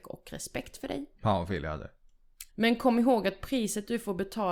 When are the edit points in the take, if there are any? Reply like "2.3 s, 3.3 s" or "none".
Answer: 1.1 s, 2.5 s